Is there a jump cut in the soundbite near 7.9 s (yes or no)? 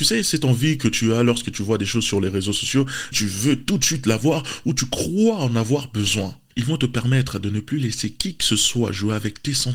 no